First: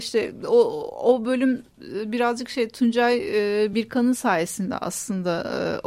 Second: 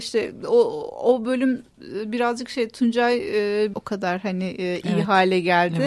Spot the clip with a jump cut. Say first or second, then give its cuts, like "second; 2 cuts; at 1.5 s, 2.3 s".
second; 1 cut; at 3.7 s